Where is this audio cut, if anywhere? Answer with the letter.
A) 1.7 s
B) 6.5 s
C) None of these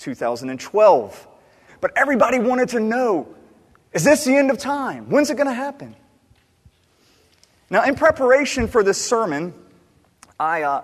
A